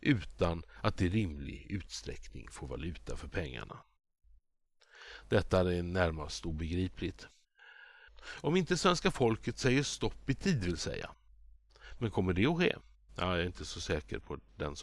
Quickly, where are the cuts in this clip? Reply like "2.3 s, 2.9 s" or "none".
8.1 s